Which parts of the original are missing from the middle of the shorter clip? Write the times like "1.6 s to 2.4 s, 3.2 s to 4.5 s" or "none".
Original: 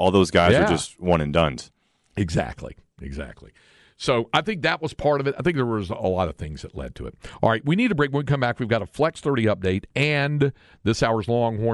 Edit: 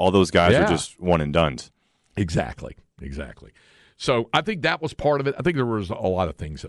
none